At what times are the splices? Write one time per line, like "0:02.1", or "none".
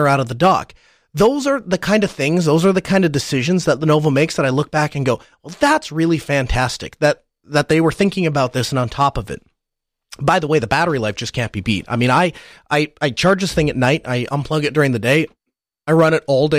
none